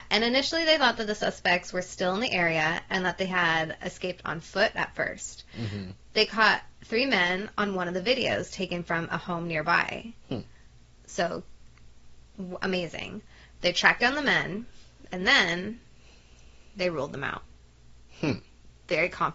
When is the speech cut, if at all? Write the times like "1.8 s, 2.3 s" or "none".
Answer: none